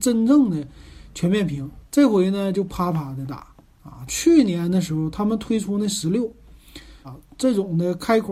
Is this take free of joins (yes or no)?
no